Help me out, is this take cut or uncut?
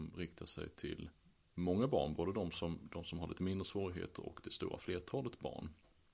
cut